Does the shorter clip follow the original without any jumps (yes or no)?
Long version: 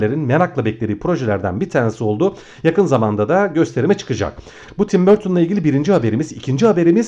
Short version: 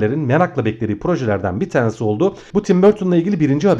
no